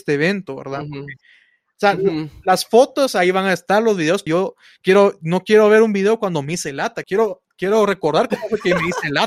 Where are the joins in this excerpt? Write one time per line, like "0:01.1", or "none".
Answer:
0:04.3
0:07.0